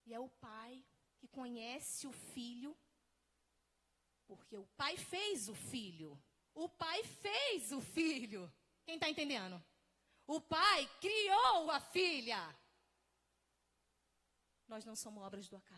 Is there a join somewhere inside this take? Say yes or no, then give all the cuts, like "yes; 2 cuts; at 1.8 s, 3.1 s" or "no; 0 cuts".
yes; 1 cut; at 6.5 s